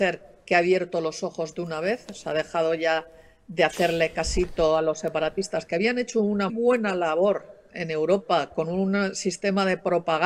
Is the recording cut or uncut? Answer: cut